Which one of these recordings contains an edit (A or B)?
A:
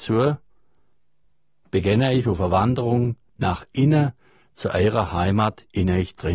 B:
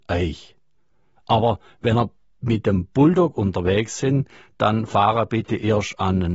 B